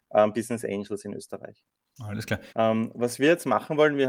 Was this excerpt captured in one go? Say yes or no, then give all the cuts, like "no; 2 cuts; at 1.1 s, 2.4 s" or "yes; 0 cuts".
no; 1 cut; at 2.5 s